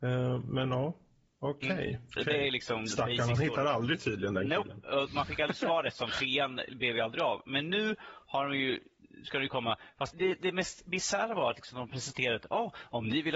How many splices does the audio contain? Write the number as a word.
two